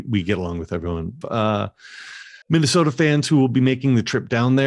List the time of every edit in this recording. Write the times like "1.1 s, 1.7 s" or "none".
1.2 s, 2.4 s